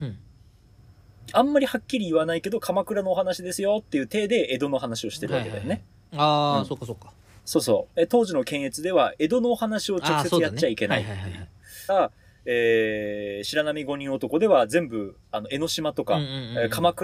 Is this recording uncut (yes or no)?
no